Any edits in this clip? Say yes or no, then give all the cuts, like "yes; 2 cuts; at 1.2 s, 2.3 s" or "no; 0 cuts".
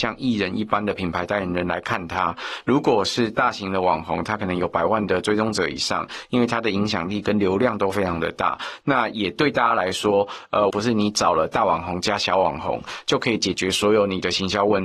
yes; 2 cuts; at 8.8 s, 10.7 s